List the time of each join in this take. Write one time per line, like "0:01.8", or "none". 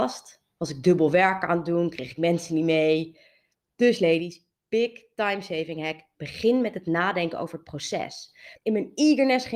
0:03.5
0:08.6